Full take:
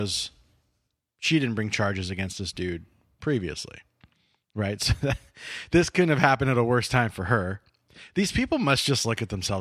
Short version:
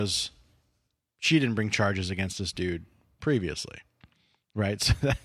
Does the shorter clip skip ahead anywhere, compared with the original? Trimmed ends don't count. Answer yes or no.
no